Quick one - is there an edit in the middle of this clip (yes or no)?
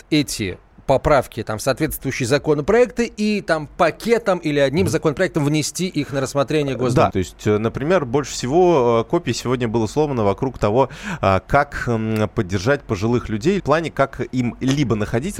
yes